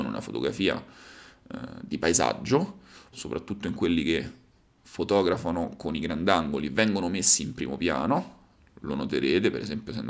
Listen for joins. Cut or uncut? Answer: cut